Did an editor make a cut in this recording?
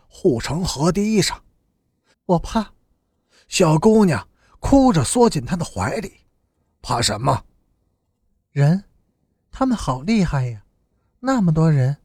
yes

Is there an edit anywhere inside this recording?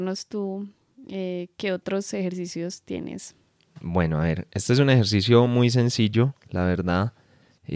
no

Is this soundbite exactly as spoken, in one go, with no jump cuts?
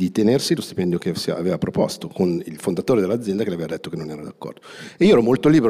yes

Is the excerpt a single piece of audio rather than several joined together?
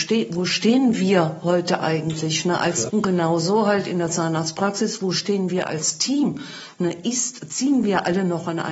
no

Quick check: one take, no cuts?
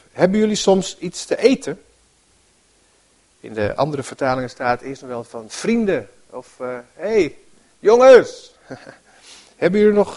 yes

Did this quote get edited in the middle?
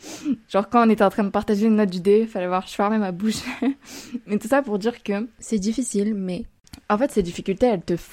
no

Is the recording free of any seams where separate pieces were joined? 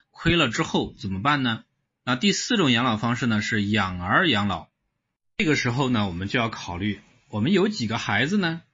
no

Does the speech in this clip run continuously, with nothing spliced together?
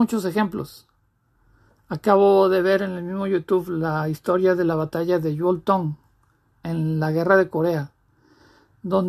yes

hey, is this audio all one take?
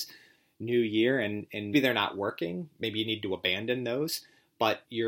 no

